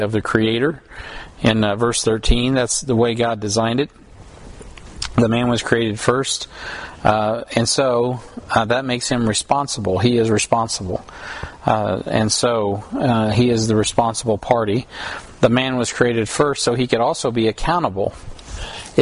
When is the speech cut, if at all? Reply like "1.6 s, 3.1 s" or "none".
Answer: none

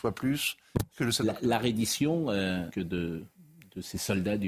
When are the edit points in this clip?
2.7 s

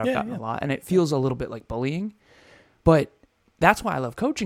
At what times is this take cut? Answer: none

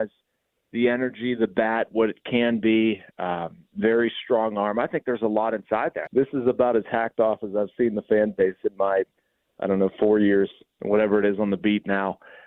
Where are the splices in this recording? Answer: 6.1 s

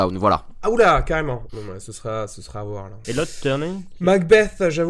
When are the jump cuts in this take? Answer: 1.5 s, 3.0 s

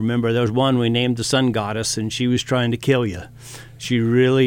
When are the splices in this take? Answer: none

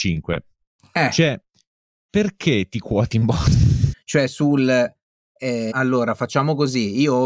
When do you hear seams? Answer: 3.9 s, 5.7 s

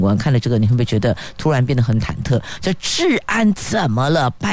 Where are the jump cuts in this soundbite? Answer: none

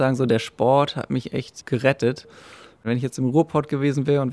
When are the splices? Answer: none

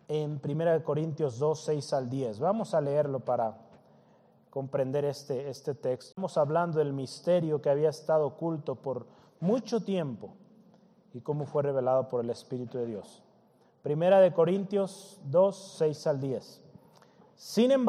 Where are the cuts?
6.1 s

